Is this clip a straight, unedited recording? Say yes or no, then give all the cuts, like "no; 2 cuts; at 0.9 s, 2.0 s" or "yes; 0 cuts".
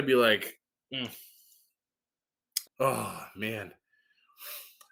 no; 1 cut; at 2.6 s